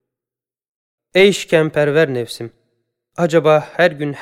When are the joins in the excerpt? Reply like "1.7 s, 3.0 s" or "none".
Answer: 1.0 s